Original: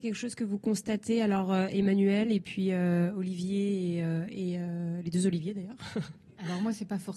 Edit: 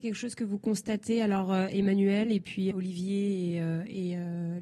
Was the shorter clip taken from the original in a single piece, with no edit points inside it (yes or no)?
no